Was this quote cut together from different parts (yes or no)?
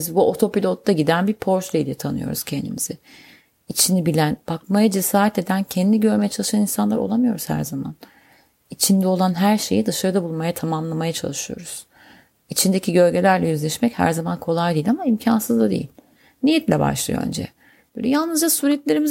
yes